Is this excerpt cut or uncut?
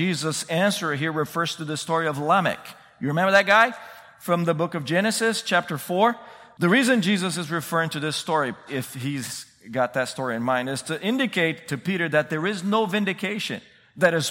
cut